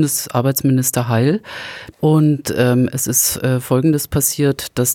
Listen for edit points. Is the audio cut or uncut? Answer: cut